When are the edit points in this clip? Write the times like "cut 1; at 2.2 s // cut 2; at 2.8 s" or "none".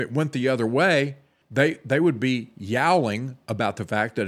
cut 1; at 1.4 s